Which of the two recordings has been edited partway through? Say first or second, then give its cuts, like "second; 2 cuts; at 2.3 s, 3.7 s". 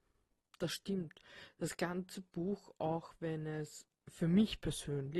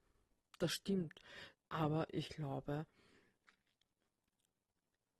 second; 1 cut; at 1.5 s